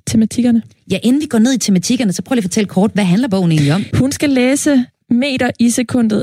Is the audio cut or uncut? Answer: cut